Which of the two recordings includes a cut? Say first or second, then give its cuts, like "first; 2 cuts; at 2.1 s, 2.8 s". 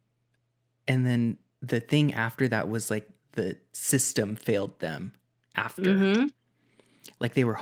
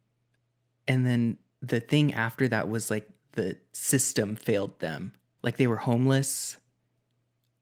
second; 1 cut; at 5.4 s